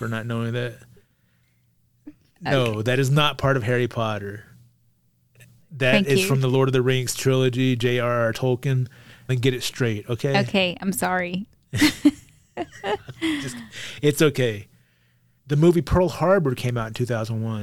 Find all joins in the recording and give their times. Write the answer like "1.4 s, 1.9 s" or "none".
15.4 s